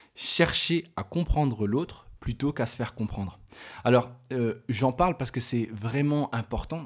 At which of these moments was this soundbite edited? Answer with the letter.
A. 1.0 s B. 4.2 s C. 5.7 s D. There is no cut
D